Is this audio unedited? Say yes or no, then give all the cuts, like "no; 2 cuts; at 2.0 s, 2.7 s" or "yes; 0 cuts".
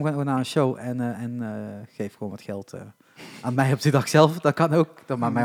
yes; 0 cuts